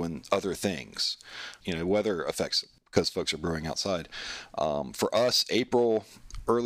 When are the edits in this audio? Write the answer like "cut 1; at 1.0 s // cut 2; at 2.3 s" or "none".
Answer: cut 1; at 1.6 s